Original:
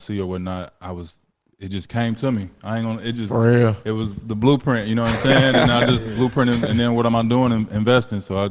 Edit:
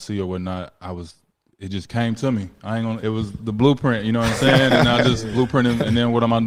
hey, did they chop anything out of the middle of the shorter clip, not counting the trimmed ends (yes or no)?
yes